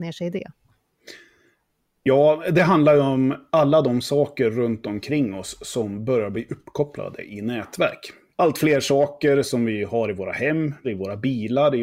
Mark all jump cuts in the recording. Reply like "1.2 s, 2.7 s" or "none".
8.3 s, 10.8 s